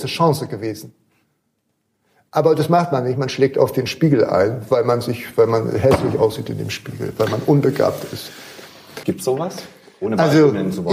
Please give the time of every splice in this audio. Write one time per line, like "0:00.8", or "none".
0:09.0